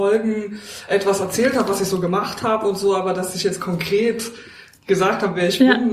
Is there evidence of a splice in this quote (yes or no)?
no